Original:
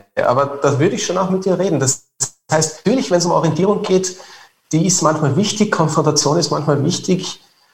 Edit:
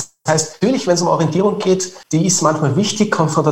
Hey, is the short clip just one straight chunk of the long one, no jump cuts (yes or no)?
no